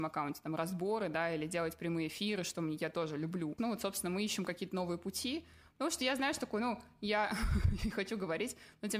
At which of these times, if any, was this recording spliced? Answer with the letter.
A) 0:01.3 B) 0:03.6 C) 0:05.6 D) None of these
B